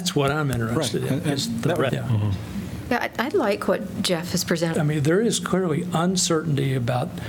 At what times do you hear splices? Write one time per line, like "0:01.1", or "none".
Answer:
0:01.9
0:04.7